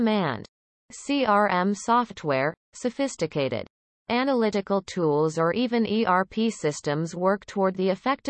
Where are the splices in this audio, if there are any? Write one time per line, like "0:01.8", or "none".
none